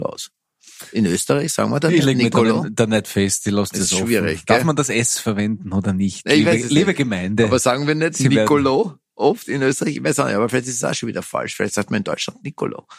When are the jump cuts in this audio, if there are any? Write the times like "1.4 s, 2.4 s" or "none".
none